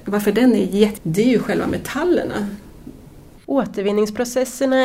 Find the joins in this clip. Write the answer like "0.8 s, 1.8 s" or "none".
1.0 s, 3.4 s